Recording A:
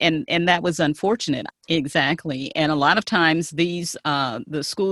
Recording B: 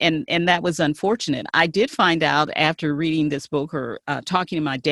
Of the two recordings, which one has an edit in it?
A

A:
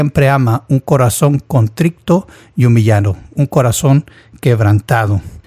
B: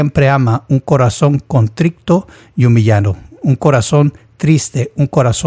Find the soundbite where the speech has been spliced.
A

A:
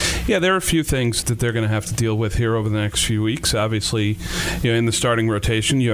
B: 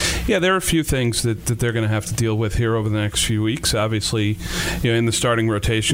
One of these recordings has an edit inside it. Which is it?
A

